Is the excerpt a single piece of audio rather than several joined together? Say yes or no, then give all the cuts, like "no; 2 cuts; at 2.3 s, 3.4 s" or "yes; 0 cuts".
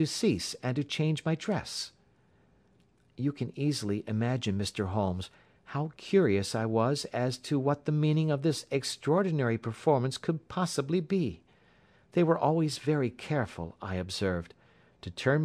yes; 0 cuts